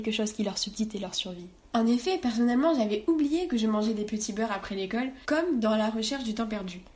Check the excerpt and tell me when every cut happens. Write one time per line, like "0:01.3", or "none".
0:01.6
0:05.2